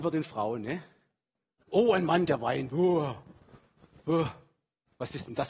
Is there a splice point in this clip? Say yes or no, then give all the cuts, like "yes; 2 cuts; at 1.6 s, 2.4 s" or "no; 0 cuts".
yes; 1 cut; at 1.6 s